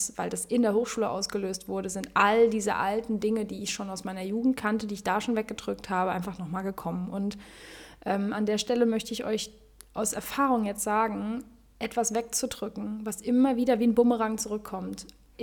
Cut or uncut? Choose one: uncut